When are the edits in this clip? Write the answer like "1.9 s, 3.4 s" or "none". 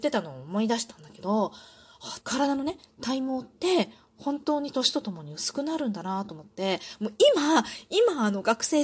2.2 s

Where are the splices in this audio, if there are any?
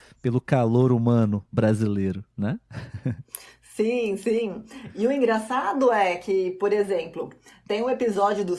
none

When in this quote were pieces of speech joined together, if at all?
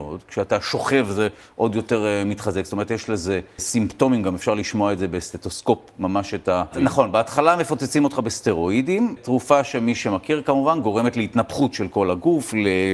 6.7 s

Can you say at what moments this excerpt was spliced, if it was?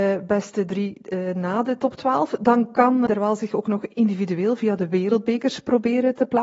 3.1 s

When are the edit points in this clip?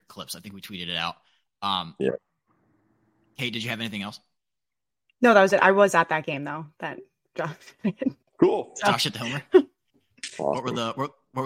9.5 s

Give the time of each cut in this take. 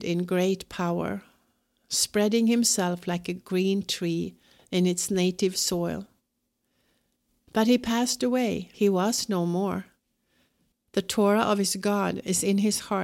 8.7 s, 10.7 s

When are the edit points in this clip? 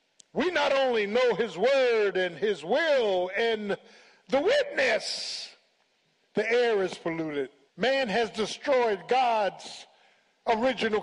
6.2 s, 7.7 s

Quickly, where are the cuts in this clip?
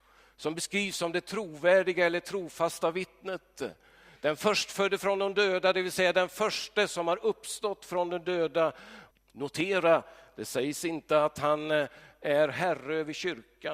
9.1 s

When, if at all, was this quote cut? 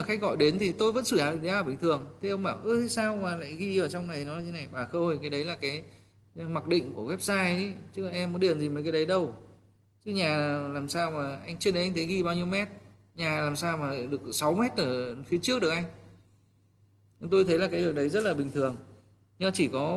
6.9 s

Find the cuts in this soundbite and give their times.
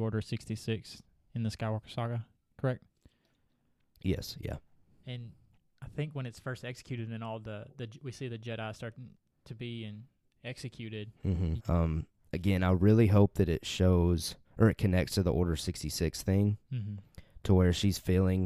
11.6 s, 14.4 s

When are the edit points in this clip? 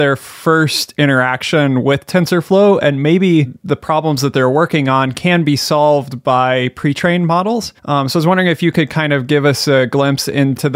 7.8 s

